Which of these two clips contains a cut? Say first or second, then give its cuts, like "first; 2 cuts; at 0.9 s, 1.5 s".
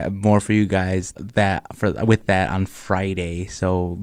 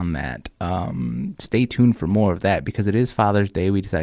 first; 1 cut; at 1.2 s